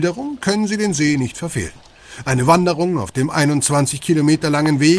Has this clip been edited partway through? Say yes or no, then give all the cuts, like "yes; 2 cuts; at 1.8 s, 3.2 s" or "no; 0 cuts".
no; 0 cuts